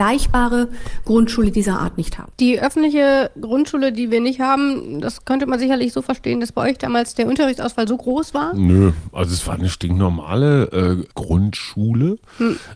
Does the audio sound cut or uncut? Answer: cut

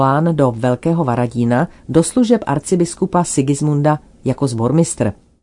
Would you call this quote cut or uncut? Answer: cut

